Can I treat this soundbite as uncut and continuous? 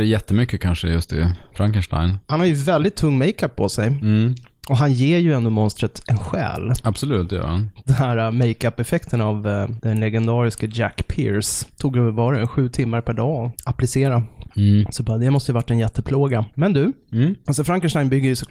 yes; 0 cuts

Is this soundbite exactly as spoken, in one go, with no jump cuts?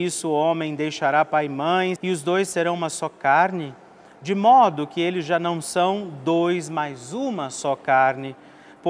no; 1 cut; at 2.0 s

